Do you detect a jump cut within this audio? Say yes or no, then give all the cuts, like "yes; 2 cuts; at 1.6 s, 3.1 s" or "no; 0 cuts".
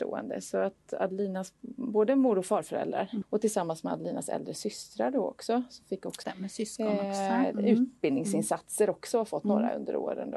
yes; 2 cuts; at 3.2 s, 6.2 s